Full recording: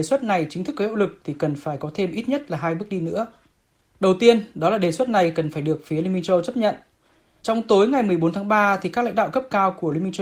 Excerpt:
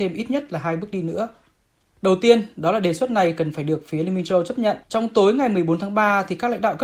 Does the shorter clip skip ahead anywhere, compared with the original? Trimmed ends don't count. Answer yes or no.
yes